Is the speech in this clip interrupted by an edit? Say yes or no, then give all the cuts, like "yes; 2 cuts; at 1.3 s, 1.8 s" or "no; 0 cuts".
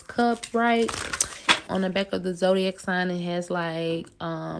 yes; 1 cut; at 1.7 s